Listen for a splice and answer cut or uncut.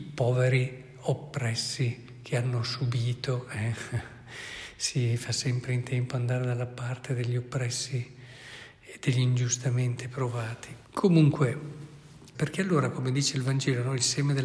cut